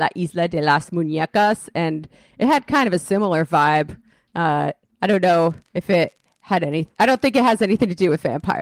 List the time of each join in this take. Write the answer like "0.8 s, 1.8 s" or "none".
5.7 s